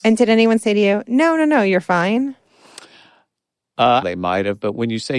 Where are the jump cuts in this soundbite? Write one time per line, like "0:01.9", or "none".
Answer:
0:04.0